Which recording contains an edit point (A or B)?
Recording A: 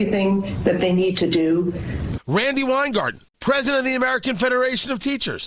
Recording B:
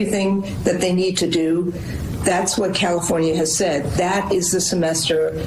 A